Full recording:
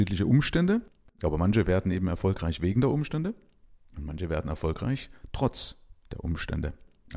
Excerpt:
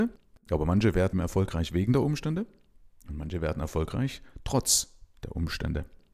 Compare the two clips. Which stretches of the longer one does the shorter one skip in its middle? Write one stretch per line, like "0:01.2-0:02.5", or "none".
0:01.8-0:02.0